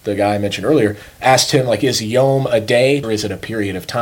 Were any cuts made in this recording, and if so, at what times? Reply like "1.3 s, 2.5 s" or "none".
3.0 s

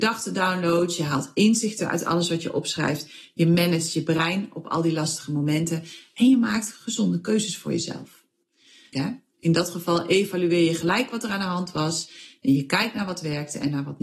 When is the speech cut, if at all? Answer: 8.9 s

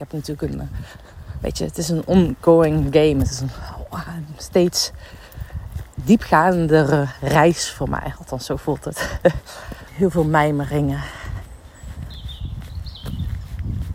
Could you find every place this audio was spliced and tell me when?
9.9 s

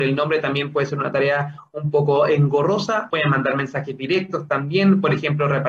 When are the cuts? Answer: 3.1 s

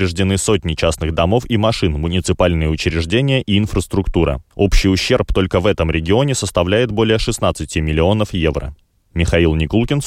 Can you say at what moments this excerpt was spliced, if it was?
none

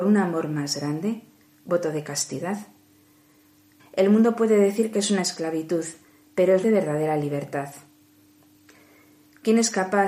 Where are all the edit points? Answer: 3.8 s, 6.6 s

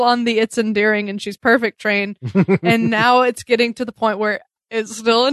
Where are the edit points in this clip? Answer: none

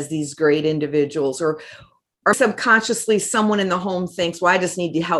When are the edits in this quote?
2.3 s

